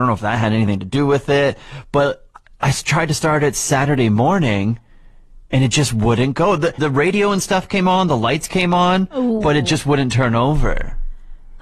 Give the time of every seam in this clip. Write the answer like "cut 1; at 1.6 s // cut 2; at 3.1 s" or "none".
cut 1; at 6.8 s